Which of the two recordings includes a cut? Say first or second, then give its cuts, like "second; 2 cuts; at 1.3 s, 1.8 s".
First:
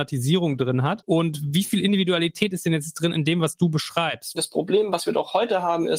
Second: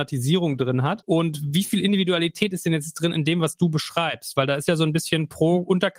first; 1 cut; at 4.3 s